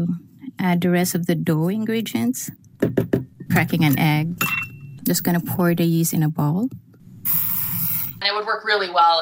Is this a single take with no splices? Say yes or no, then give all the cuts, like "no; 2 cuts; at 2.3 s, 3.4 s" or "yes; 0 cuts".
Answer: no; 3 cuts; at 3.5 s, 5.0 s, 8.2 s